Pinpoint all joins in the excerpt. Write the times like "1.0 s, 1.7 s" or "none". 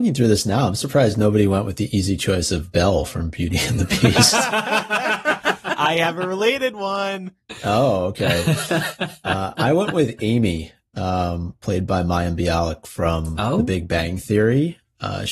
none